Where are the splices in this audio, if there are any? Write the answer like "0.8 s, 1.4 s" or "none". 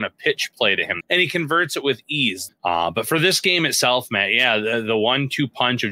1.0 s, 2.5 s